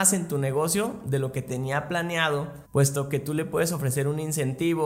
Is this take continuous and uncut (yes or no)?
no